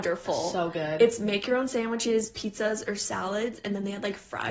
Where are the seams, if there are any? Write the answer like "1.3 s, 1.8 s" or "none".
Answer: none